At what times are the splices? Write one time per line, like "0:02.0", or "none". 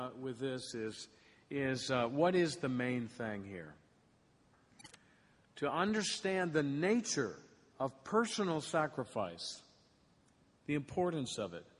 none

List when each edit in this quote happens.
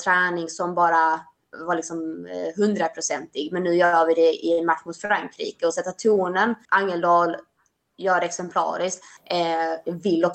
0:06.7
0:09.2

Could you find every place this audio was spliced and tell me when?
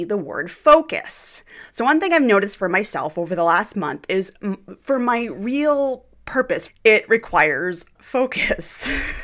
0:06.7
0:08.0

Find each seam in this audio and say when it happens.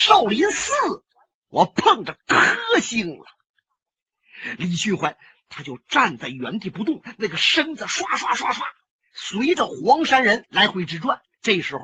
0:01.4

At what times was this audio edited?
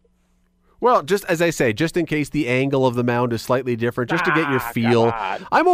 none

